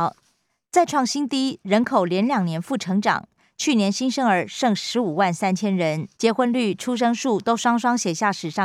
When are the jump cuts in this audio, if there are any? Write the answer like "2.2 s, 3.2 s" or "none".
6.1 s